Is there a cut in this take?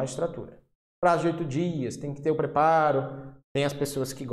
yes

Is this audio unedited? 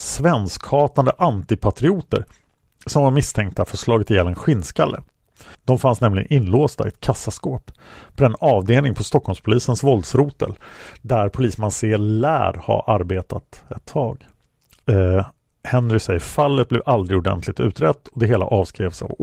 no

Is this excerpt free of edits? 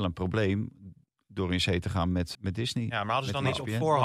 no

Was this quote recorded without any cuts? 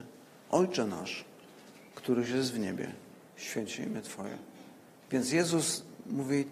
yes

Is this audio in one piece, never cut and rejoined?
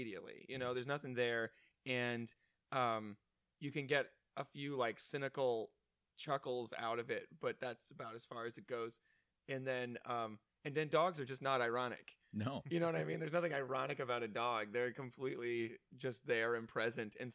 yes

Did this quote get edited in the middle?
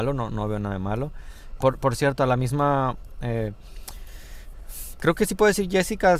yes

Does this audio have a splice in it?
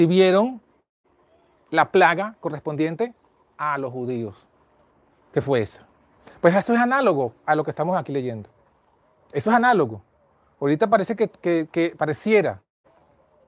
no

